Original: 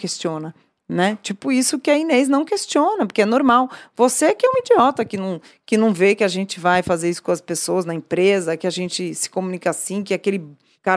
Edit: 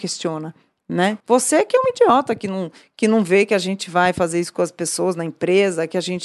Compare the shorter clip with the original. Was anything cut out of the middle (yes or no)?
yes